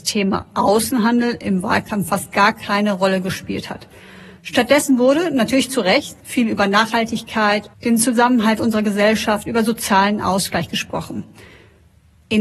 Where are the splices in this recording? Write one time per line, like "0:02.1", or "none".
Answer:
0:06.2
0:07.7